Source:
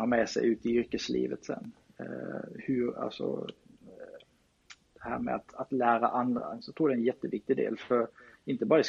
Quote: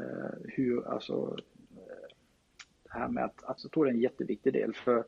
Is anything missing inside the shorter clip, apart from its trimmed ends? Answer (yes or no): yes